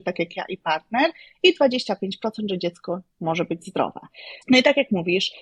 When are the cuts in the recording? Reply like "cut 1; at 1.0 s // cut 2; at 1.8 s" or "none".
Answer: cut 1; at 4.4 s